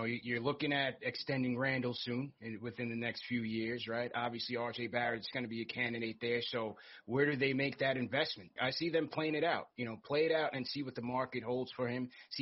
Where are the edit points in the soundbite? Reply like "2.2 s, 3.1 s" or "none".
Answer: 8.6 s